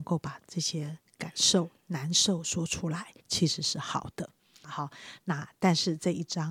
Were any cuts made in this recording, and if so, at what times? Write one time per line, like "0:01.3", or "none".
0:03.2
0:04.6